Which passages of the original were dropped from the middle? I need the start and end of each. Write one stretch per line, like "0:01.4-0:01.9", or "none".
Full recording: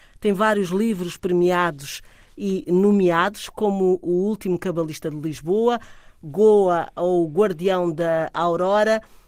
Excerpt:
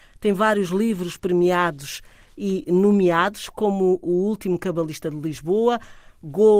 none